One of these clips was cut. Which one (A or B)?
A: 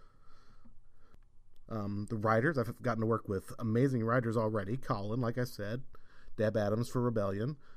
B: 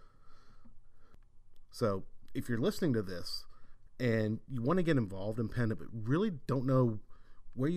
A